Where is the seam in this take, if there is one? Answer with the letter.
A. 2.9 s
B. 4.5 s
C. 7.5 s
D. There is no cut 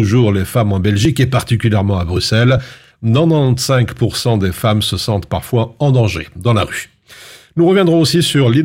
D